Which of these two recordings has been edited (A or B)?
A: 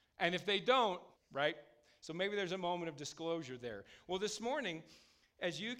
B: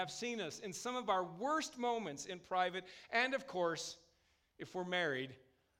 A